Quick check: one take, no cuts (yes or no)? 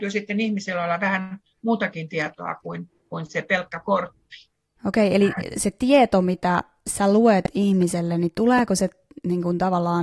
no